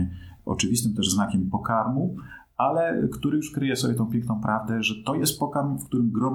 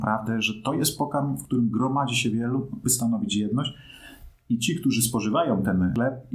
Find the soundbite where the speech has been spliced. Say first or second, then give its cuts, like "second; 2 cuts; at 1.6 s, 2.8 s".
second; 1 cut; at 2.8 s